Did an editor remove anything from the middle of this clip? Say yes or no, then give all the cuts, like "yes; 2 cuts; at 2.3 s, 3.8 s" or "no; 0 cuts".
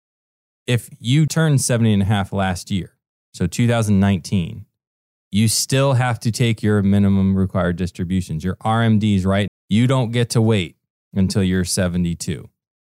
yes; 2 cuts; at 1.3 s, 9.5 s